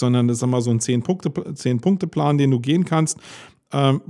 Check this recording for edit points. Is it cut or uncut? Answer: uncut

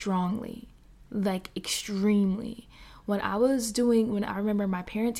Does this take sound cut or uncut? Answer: cut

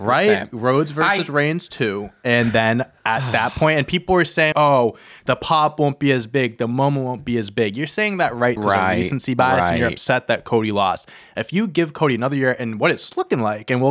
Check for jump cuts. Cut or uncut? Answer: cut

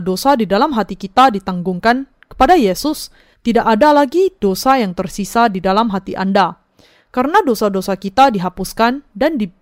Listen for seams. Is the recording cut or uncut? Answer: cut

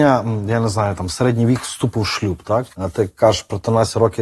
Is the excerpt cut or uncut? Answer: cut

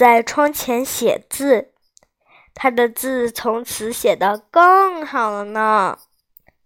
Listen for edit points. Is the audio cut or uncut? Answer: uncut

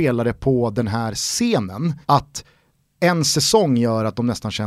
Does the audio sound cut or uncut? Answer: cut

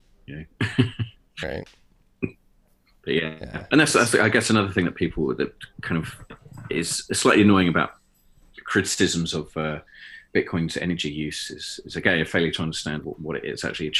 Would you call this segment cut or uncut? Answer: uncut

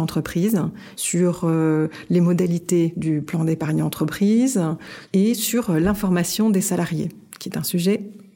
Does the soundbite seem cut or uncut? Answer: cut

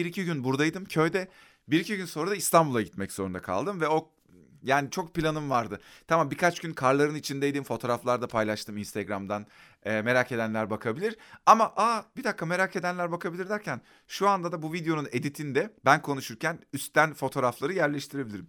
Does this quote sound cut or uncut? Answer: cut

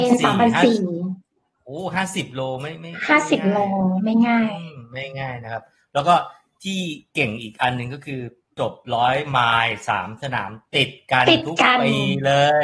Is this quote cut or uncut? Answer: uncut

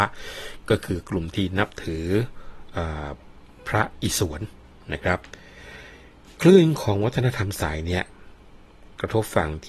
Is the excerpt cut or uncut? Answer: uncut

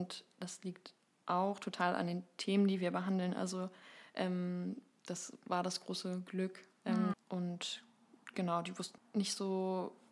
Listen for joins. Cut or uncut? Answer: cut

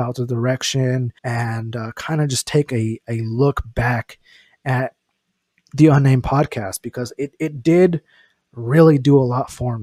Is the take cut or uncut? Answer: cut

